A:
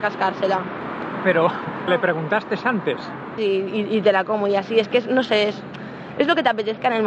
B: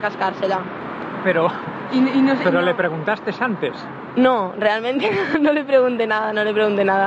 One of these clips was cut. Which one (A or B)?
A